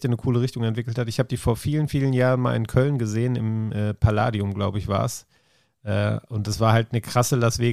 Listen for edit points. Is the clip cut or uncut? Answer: uncut